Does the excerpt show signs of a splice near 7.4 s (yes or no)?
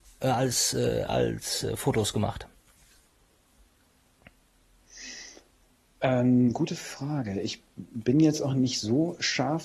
no